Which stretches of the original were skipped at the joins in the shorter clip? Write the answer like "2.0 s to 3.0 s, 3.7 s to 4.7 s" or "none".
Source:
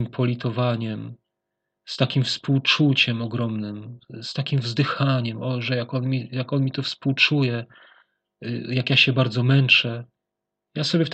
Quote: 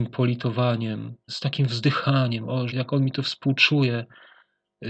1.3 s to 4.2 s, 5.6 s to 6.3 s